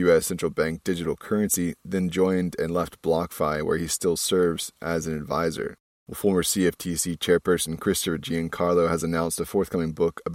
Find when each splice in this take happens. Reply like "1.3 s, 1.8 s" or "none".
6.0 s